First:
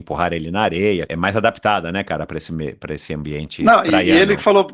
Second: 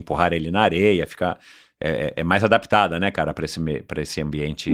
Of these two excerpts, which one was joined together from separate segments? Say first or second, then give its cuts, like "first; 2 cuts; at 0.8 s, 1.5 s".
first; 1 cut; at 1.1 s